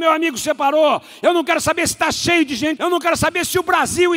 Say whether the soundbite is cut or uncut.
cut